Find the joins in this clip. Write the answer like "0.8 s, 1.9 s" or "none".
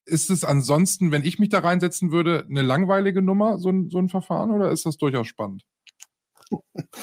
none